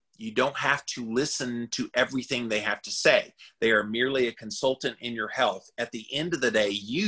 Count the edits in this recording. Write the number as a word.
zero